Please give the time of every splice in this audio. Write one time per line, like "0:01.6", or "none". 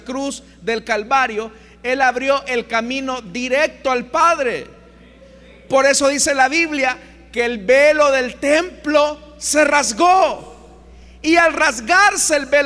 none